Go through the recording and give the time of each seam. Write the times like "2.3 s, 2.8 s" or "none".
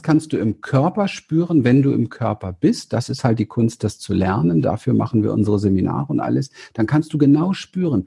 none